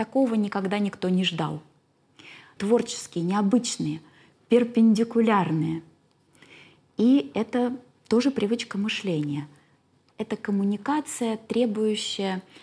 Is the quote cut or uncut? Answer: cut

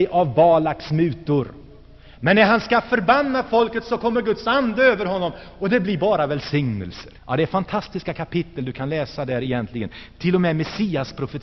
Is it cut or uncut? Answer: cut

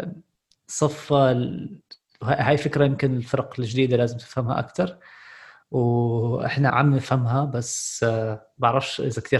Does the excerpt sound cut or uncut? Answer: cut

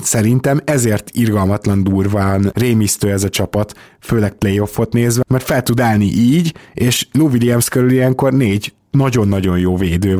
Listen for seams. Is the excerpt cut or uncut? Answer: cut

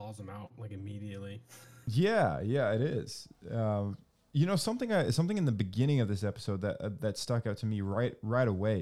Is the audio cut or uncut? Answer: uncut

